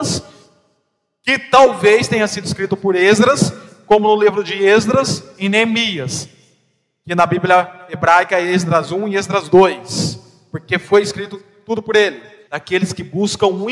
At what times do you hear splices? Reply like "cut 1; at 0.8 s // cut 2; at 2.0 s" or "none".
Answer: cut 1; at 12.5 s